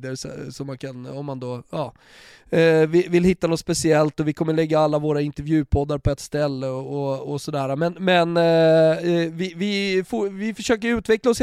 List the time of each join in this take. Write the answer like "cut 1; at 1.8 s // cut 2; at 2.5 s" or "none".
none